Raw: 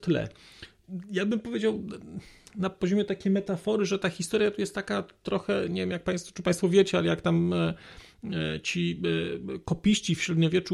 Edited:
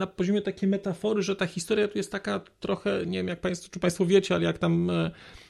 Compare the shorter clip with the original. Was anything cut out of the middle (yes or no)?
no